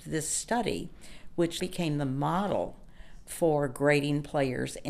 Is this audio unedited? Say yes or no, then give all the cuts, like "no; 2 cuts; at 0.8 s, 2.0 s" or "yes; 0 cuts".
no; 1 cut; at 1.6 s